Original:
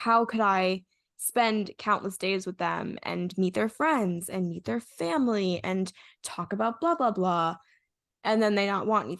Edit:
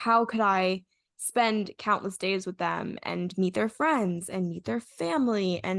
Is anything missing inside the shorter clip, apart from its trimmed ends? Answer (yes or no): no